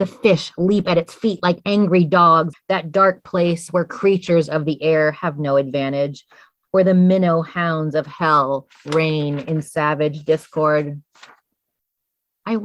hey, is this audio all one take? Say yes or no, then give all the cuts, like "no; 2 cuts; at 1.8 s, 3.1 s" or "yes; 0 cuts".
no; 1 cut; at 2.5 s